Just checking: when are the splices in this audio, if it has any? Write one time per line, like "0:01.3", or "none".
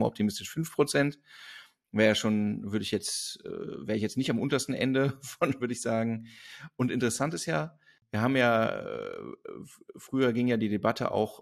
0:05.6